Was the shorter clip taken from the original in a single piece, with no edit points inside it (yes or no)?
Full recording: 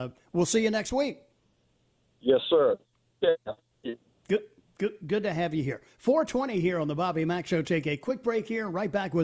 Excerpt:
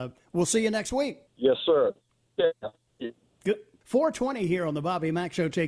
no